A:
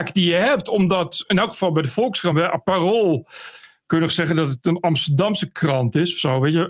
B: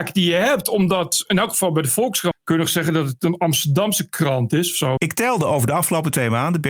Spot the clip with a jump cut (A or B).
B